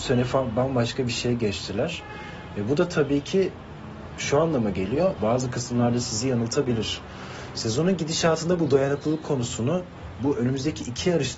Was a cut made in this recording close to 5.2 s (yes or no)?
yes